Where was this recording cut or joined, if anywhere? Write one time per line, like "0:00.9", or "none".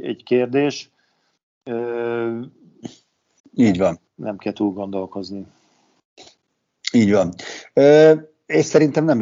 0:03.4